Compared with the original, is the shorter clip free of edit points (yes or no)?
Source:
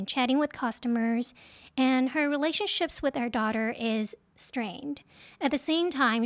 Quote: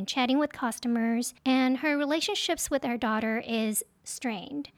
no